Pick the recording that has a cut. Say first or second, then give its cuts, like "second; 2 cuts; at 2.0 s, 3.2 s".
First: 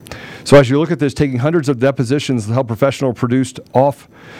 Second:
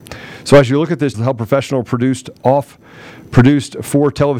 second; 1 cut; at 1.1 s